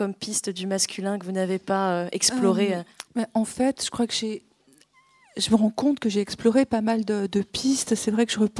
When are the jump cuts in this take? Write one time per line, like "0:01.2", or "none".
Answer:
0:03.1

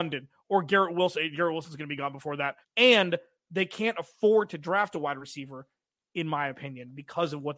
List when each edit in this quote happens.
0:02.6

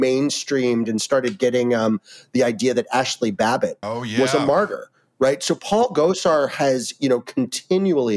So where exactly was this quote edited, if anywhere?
0:03.8

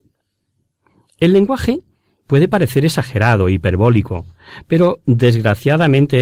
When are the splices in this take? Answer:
none

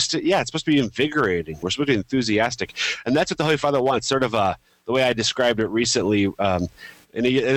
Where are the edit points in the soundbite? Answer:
0:01.6

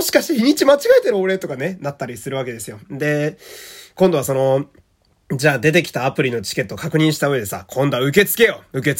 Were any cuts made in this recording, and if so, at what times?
0:02.8

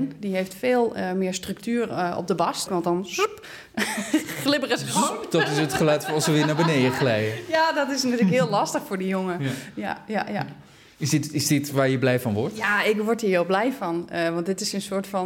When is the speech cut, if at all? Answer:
0:02.7

